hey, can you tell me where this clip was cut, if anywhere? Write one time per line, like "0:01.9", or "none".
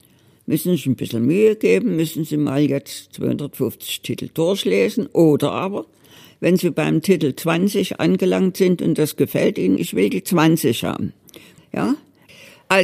0:09.8
0:11.6

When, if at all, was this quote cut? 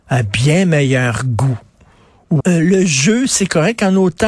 0:02.4

